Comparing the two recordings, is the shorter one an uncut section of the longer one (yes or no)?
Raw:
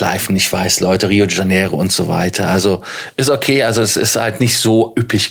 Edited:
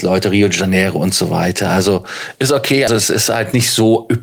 no